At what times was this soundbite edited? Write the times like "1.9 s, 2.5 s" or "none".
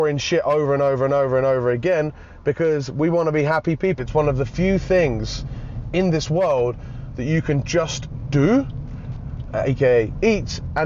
4.0 s, 9.5 s

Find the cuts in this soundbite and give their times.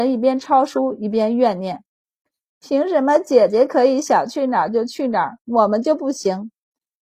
none

